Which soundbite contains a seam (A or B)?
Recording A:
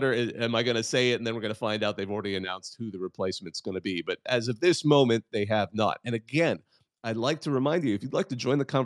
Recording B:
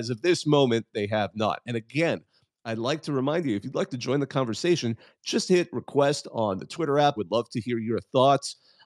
B